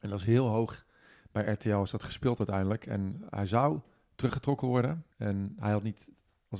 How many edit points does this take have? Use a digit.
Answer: 1